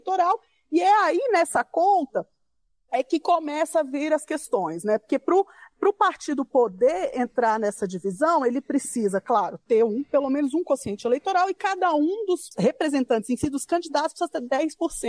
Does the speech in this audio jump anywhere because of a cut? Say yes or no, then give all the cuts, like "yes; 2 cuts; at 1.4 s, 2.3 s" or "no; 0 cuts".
no; 0 cuts